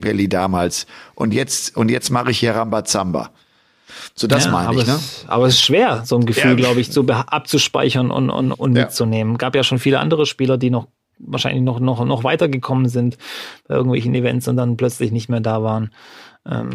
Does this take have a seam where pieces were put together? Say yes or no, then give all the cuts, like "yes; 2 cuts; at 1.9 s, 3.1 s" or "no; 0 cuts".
yes; 1 cut; at 8.5 s